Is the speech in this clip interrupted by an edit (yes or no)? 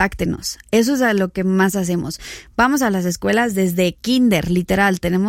no